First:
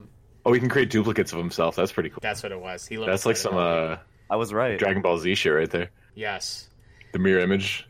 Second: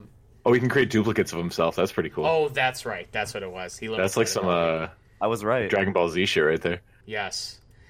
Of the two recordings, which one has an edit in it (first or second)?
first